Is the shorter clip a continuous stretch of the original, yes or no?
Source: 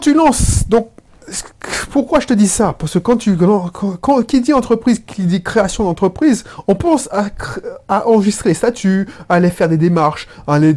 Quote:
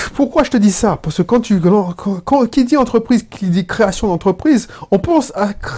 yes